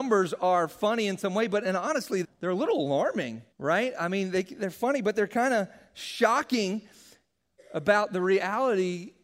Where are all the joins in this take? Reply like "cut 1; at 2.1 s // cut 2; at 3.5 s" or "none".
cut 1; at 2.2 s // cut 2; at 3.5 s